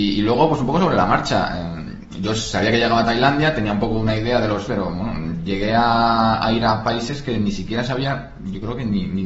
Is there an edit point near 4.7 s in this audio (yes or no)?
yes